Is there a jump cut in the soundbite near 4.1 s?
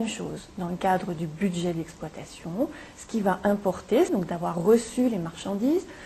yes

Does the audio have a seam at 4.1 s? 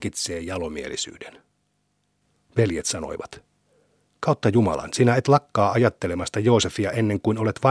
no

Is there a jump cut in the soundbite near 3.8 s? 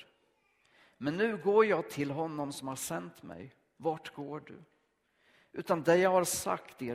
yes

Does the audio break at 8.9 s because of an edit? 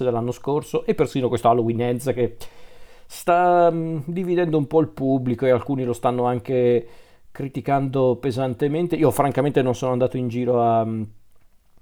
no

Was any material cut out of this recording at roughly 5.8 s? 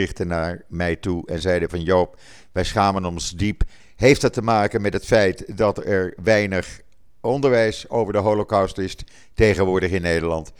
no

